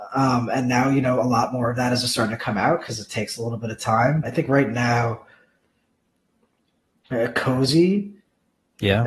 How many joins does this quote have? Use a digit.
1